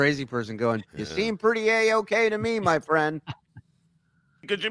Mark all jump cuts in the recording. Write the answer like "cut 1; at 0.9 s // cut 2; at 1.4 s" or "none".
none